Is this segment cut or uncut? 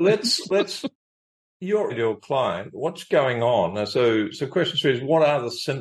cut